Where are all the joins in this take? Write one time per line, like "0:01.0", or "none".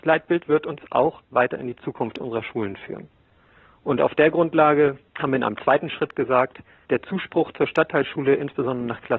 0:05.1
0:06.9